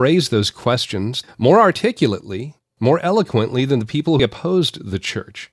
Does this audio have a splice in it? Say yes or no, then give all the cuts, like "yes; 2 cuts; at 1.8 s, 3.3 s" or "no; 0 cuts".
yes; 2 cuts; at 1.2 s, 4.2 s